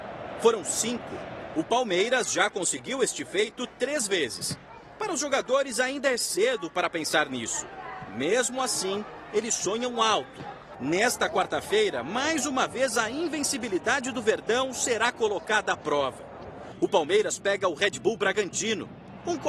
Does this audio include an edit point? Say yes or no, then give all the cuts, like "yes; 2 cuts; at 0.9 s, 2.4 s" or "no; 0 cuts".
yes; 1 cut; at 10.7 s